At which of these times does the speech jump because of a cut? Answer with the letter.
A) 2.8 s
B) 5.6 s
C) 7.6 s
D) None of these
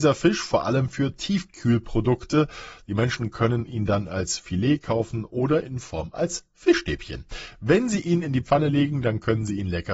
B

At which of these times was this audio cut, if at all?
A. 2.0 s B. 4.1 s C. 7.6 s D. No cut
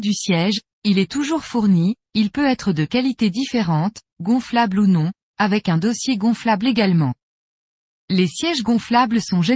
A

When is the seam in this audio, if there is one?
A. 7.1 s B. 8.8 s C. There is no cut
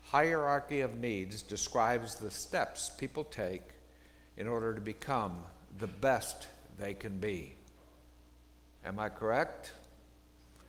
B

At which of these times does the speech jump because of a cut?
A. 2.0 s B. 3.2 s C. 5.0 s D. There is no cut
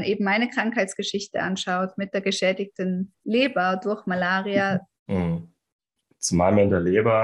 C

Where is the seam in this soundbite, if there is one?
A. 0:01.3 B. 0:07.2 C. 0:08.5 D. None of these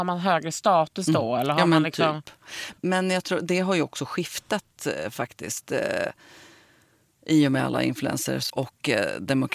C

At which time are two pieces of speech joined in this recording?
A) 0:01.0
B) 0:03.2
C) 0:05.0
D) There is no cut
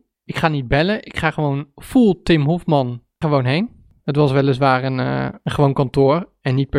B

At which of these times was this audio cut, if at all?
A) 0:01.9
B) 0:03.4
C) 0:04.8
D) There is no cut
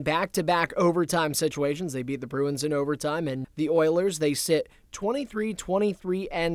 B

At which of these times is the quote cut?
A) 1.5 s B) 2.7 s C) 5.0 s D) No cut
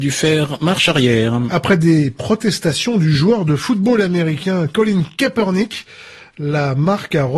D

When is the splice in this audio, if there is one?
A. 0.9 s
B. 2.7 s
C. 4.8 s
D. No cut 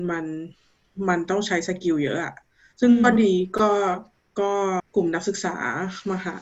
C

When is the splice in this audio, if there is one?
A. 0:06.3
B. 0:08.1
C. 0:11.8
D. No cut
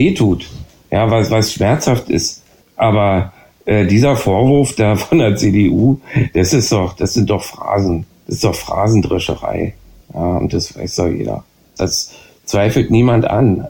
C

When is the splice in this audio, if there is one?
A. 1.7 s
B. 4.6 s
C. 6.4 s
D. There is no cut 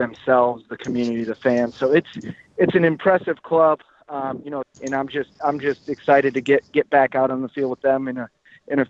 B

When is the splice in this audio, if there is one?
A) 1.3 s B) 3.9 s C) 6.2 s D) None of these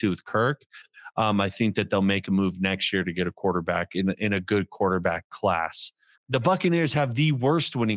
C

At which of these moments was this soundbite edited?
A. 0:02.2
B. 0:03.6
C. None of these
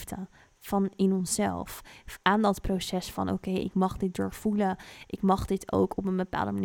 B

